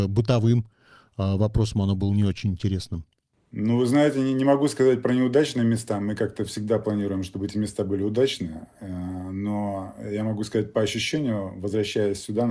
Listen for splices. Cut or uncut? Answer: uncut